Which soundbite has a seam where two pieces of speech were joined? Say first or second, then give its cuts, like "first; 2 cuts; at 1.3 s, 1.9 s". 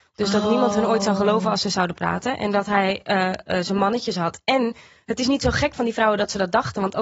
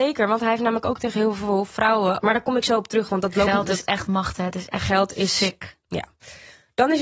second; 1 cut; at 2.2 s